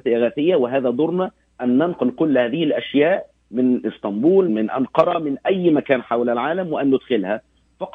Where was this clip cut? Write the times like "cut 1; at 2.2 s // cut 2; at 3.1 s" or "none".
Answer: cut 1; at 4.5 s